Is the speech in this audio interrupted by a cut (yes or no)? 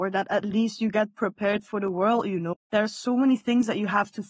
yes